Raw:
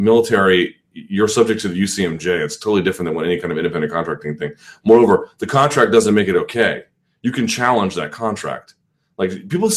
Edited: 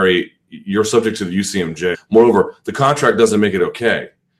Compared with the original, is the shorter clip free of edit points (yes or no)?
no